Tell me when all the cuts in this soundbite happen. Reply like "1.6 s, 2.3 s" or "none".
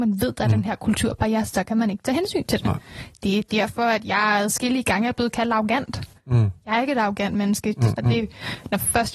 8.0 s